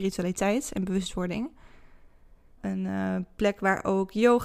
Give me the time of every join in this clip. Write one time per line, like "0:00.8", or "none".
0:02.6

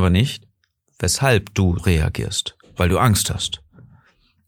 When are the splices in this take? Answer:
0:01.8

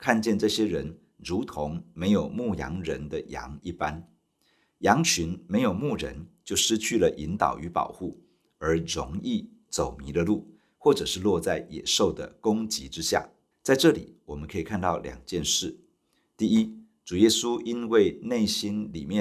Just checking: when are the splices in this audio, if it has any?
0:13.5

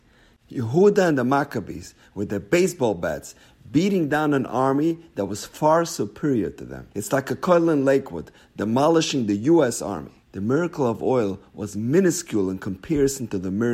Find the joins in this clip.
0:06.9
0:10.2

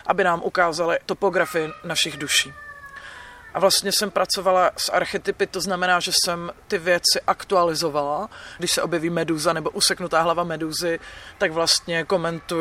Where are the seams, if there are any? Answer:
0:03.5
0:06.6
0:08.6

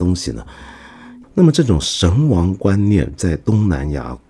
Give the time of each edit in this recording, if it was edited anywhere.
0:01.2

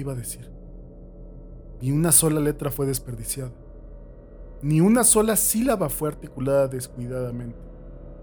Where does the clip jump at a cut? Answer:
none

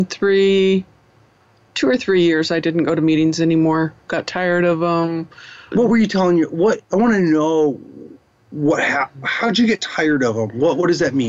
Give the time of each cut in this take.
0:05.7
0:06.8

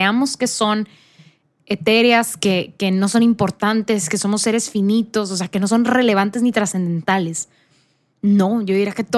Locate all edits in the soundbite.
none

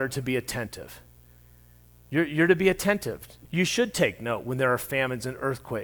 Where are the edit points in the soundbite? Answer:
0:03.5

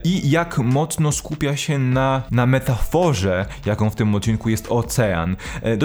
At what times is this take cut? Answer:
0:02.3

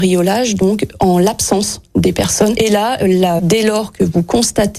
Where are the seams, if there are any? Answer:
0:03.4

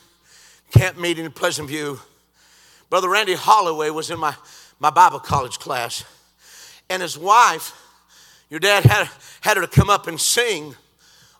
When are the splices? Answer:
none

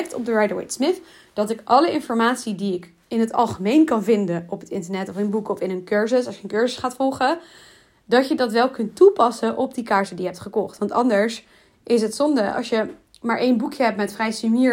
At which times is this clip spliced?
none

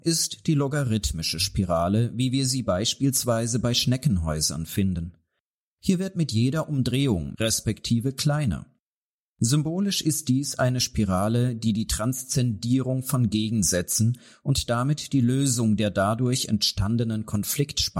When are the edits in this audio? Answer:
0:07.3

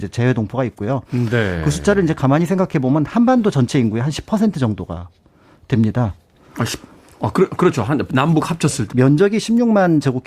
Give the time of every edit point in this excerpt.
0:08.9

